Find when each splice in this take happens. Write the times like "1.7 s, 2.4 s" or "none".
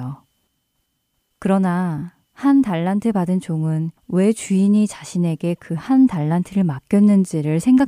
1.3 s, 4.0 s